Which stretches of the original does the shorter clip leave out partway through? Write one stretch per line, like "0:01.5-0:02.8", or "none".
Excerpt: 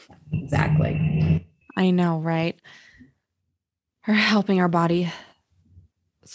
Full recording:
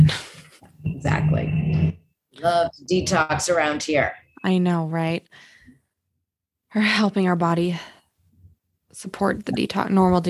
0:02.1-0:04.3

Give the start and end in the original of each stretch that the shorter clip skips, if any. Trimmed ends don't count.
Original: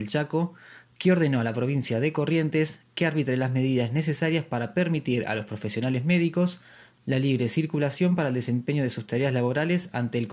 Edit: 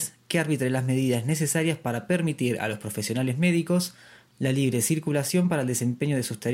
none

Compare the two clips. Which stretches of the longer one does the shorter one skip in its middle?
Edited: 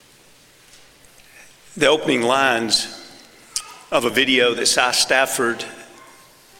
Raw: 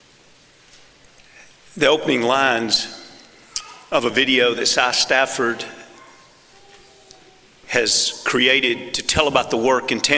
none

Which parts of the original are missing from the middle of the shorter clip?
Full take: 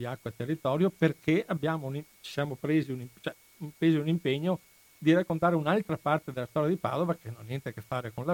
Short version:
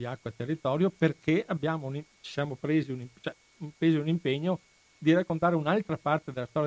none

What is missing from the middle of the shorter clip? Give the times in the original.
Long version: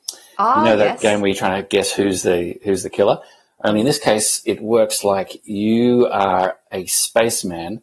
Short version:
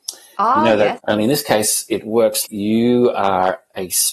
0:01.0-0:03.5
0:05.0-0:05.4

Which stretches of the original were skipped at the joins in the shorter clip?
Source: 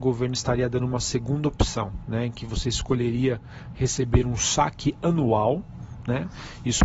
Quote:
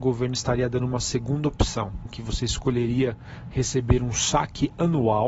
0:02.1-0:02.3

